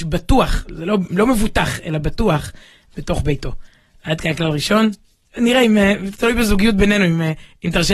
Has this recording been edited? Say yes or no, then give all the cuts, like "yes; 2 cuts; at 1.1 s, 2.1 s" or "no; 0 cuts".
no; 0 cuts